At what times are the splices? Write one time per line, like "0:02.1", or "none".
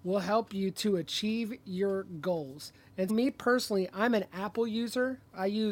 0:03.1